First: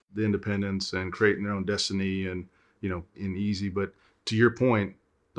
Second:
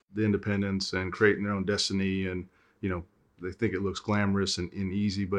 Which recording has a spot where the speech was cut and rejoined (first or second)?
first